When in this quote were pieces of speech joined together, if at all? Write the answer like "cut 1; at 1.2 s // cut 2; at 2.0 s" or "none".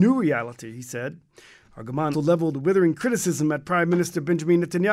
cut 1; at 2.1 s